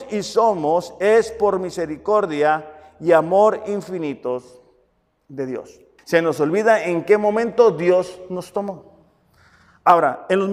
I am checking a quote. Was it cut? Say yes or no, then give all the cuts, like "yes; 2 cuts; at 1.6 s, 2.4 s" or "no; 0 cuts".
yes; 1 cut; at 6.0 s